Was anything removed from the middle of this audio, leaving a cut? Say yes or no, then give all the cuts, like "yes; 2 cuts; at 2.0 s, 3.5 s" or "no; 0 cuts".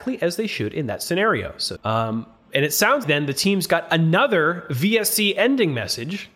yes; 2 cuts; at 1.8 s, 3.0 s